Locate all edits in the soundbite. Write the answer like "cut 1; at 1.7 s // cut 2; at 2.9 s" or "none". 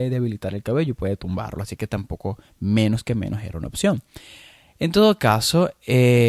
none